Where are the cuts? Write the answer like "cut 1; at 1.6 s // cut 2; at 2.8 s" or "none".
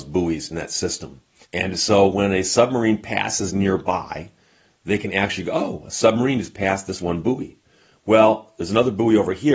cut 1; at 1.4 s